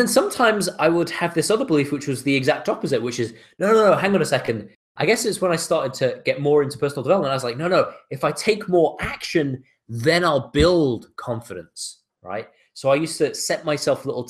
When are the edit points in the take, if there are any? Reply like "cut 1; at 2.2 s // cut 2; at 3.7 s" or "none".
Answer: none